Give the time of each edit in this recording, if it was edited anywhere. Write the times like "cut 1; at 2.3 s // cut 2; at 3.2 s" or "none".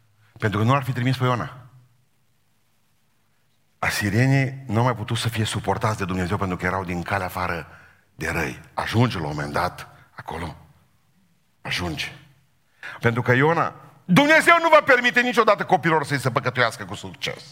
cut 1; at 13.0 s